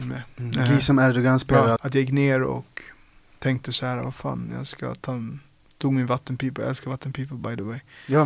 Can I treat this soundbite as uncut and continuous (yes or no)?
no